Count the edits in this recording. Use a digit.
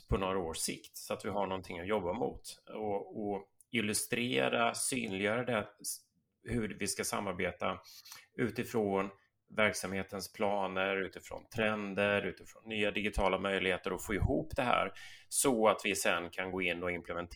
0